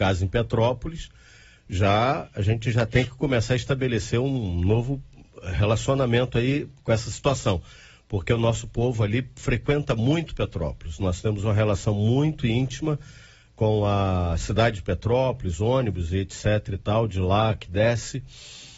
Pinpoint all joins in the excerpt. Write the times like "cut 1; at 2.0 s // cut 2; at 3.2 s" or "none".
none